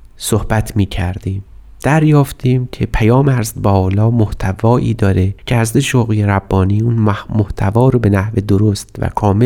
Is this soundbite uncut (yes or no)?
no